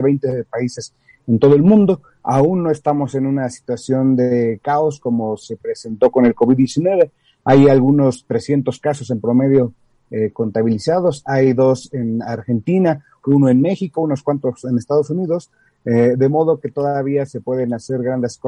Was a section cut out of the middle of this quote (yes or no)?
no